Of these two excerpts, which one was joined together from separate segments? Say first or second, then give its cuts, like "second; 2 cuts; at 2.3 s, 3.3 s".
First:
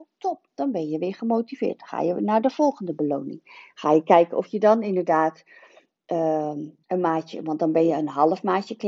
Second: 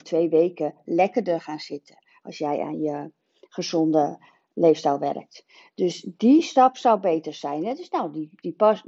first; 1 cut; at 6.8 s